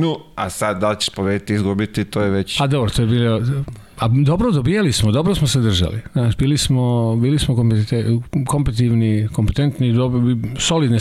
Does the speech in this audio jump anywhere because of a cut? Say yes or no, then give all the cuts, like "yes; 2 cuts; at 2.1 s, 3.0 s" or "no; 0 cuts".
no; 0 cuts